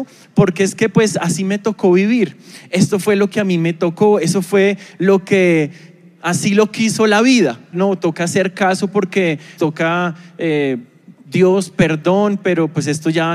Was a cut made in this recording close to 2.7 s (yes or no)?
no